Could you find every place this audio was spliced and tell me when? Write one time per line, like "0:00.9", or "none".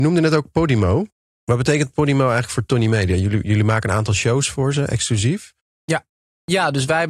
none